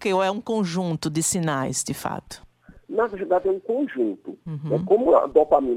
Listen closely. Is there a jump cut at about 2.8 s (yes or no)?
no